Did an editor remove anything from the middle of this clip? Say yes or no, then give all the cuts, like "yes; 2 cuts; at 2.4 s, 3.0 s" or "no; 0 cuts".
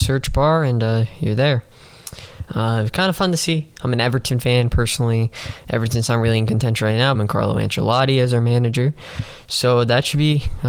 yes; 2 cuts; at 2.5 s, 7.1 s